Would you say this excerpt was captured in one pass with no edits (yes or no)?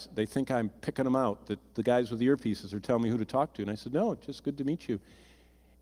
yes